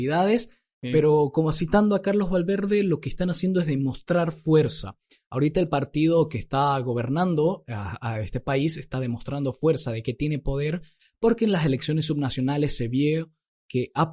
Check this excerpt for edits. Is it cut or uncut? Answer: uncut